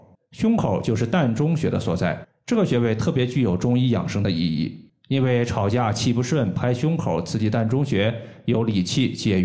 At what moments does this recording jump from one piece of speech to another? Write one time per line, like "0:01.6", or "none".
none